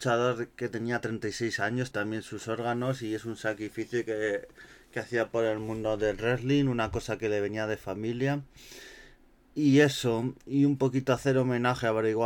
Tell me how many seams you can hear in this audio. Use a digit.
1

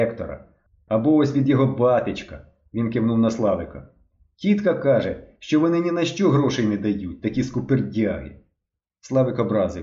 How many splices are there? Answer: 0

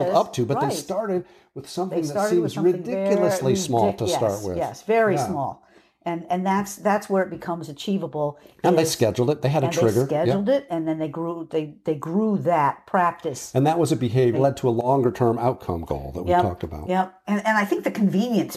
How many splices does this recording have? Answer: 2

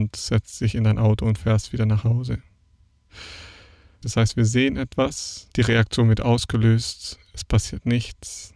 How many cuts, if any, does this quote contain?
2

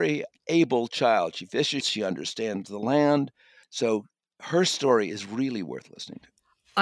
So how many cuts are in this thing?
1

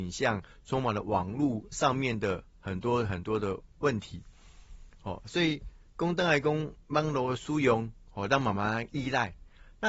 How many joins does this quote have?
0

